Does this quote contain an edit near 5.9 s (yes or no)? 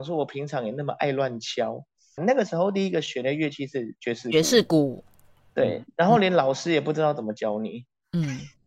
no